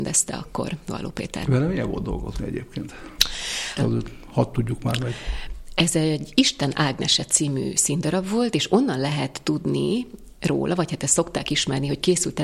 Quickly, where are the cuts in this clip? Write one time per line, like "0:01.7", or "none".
0:03.8